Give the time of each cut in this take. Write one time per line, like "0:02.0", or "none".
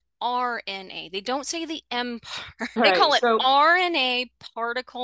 0:02.8